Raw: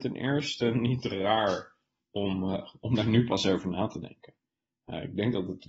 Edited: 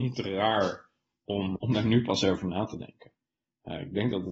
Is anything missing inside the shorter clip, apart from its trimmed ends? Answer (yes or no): yes